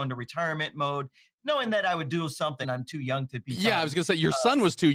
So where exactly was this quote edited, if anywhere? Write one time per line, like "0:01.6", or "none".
0:02.6